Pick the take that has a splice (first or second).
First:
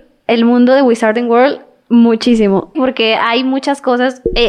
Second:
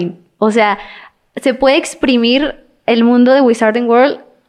first